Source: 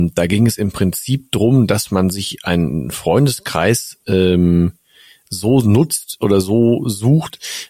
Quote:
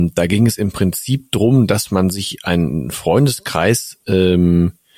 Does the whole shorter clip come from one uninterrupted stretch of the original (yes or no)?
yes